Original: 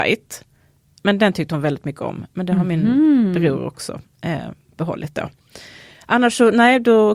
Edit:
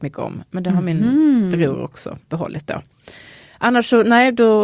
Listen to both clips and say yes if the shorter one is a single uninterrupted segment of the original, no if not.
no